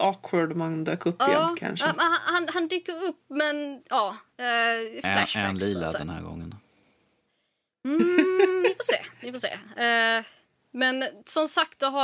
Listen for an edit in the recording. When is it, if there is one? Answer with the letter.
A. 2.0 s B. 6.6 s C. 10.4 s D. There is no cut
D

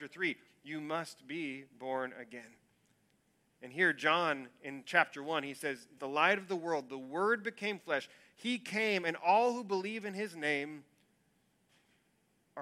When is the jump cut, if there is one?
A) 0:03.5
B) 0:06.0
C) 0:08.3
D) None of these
B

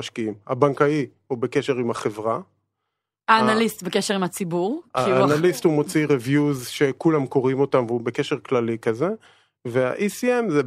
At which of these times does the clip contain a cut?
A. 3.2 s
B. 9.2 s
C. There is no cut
C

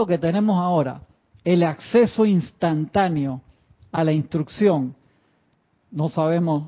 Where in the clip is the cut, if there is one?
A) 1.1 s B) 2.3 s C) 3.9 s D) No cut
D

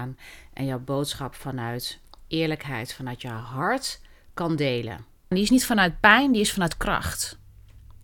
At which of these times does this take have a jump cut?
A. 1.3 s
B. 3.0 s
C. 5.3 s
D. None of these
C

